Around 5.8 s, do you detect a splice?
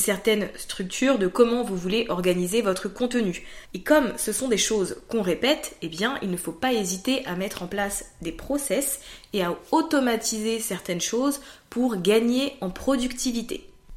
no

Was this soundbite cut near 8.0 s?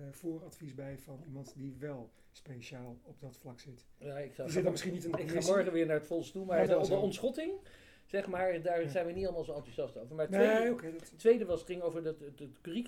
no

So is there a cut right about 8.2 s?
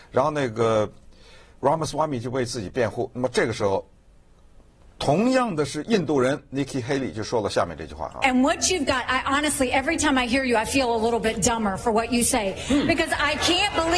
no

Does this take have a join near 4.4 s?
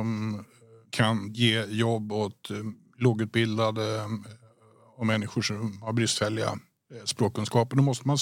no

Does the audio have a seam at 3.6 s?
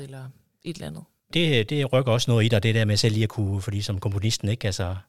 no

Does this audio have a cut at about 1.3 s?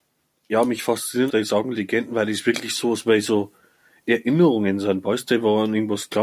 yes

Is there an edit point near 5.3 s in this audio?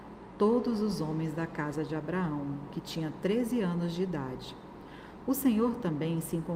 no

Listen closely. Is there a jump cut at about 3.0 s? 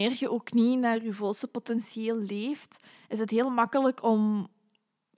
no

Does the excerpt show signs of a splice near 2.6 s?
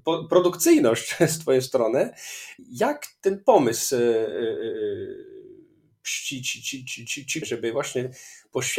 no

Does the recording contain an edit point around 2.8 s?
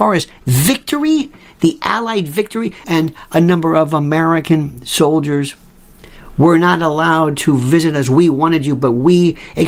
yes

